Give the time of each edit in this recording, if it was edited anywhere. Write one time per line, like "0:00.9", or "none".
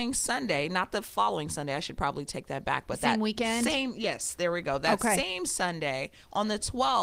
none

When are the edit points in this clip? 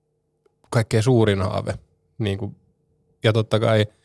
none

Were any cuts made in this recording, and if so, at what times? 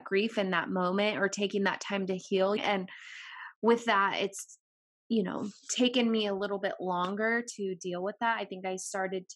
0:02.6

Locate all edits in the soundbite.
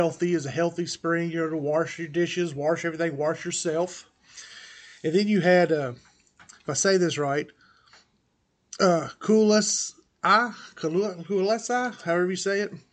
none

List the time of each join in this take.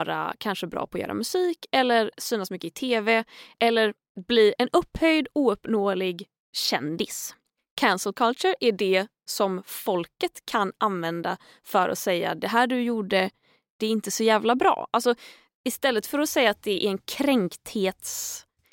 none

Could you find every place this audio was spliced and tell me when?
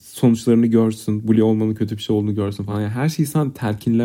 none

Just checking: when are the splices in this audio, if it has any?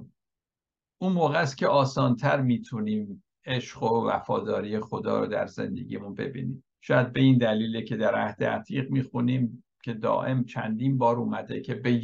0:06.7

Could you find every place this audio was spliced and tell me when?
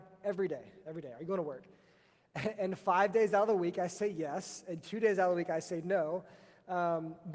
none

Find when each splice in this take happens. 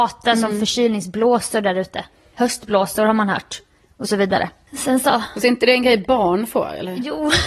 0:05.4

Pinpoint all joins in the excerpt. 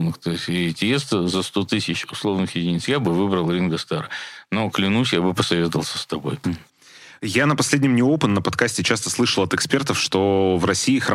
0:06.4

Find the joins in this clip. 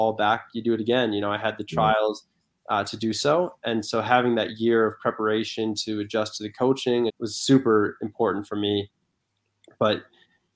0:02.5
0:07.1

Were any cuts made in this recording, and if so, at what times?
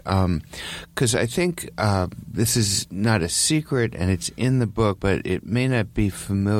0:05.0

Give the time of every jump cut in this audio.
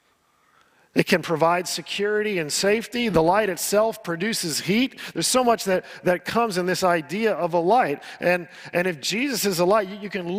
none

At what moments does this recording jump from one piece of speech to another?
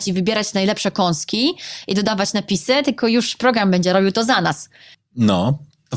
0:04.9

